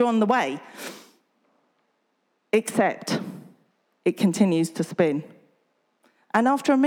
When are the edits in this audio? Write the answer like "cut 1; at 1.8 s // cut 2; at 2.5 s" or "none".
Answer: none

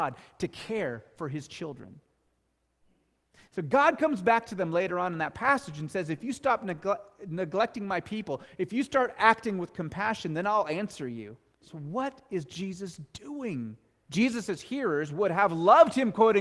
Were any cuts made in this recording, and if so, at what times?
cut 1; at 11.5 s // cut 2; at 14.1 s

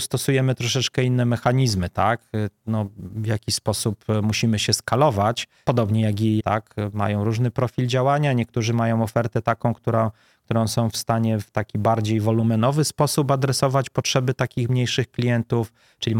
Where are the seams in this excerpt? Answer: cut 1; at 6.4 s

